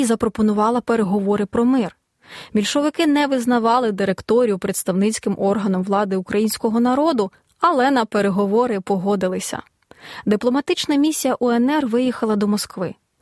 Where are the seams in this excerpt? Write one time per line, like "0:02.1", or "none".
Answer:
none